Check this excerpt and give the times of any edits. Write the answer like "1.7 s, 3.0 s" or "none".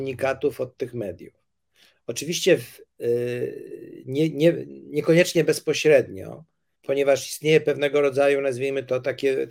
6.8 s